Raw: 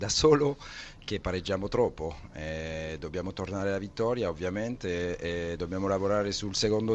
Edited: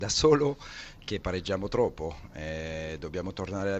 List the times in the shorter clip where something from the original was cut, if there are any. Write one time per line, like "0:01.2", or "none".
none